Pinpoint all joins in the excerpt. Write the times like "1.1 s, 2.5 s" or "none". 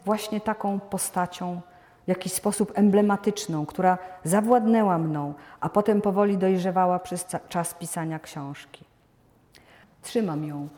9.8 s